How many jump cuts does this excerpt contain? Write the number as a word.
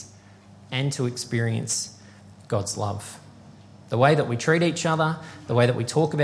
zero